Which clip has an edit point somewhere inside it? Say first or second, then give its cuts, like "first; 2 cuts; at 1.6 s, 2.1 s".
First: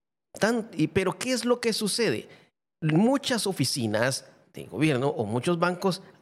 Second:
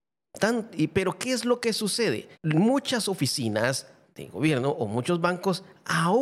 second; 1 cut; at 2.3 s